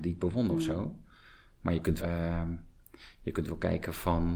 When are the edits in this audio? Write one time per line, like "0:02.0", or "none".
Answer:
0:02.0